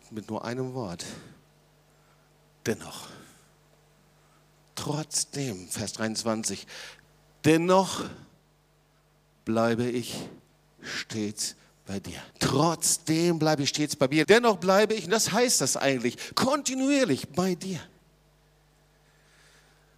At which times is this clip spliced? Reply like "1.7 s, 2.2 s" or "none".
12.3 s, 14.2 s, 16.3 s